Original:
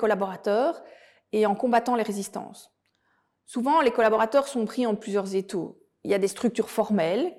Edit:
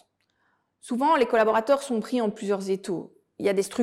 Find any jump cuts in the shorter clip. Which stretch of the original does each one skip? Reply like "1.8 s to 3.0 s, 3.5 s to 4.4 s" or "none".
none